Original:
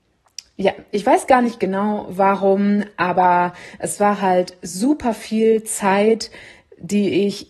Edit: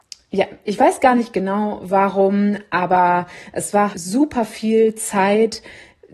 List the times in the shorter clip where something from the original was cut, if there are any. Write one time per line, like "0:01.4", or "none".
0:03.9